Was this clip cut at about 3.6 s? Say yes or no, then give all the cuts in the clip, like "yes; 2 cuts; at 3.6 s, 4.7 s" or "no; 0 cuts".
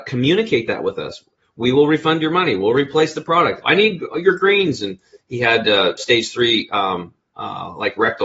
yes; 1 cut; at 3.6 s